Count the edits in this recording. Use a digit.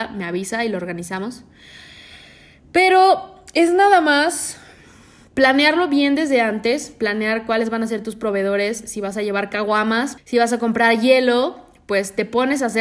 1